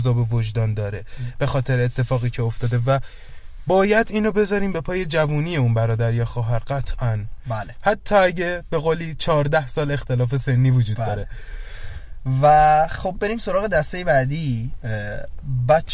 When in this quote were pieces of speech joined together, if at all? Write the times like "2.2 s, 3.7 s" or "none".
none